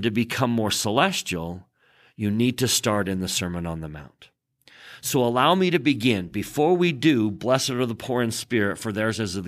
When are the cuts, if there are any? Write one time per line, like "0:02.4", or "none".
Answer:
none